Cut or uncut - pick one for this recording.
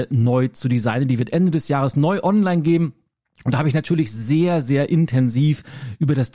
uncut